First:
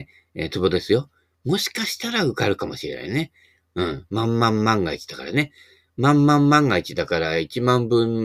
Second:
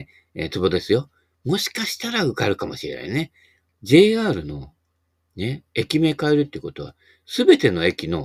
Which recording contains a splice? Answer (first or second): second